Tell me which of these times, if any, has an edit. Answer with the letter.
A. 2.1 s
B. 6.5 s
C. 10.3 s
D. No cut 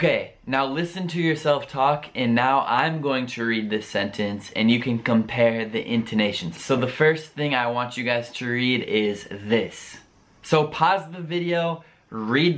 B